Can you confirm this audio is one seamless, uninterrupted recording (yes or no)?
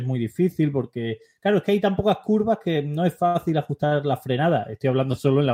yes